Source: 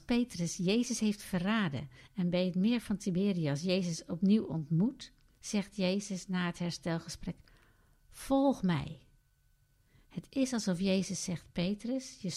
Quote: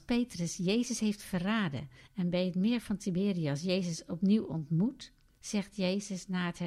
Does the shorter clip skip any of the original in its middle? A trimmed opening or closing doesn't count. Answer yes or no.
no